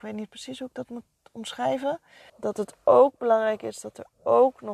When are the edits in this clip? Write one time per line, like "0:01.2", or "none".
0:02.3